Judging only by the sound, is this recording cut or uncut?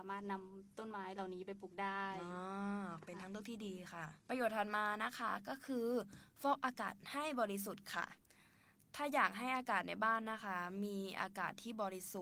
cut